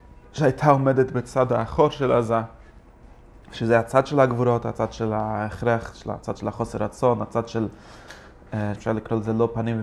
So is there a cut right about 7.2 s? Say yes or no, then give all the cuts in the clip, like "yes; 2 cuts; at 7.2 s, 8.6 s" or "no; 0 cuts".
no; 2 cuts; at 3.4 s, 8.8 s